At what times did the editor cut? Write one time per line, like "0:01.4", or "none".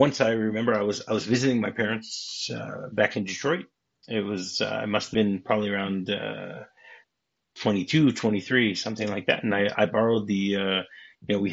none

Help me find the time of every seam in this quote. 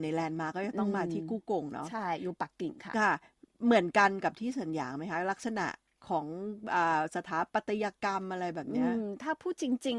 none

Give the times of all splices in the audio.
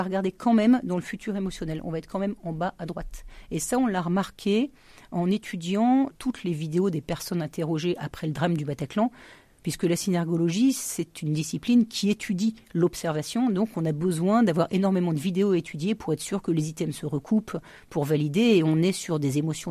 none

